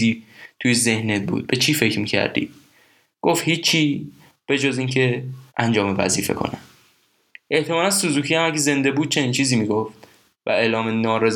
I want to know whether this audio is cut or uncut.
cut